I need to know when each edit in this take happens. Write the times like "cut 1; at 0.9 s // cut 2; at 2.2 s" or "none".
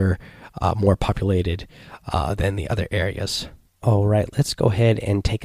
cut 1; at 3.7 s